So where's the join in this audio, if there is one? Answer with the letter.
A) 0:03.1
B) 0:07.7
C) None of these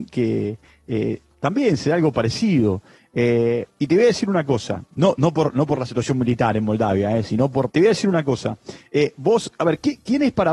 B